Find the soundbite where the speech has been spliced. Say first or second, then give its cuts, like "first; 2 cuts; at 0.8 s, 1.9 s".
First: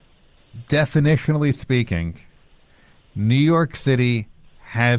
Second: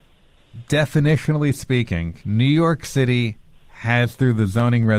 second; 1 cut; at 2.2 s